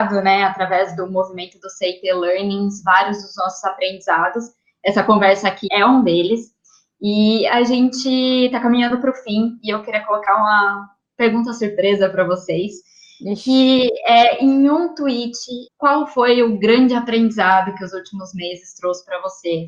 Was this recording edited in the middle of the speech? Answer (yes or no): yes